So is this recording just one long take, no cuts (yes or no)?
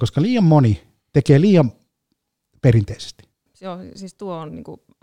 no